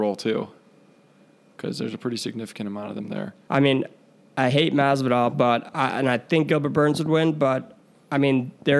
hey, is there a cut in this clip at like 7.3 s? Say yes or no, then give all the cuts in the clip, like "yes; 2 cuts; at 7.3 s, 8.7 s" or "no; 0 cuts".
no; 1 cut; at 3.5 s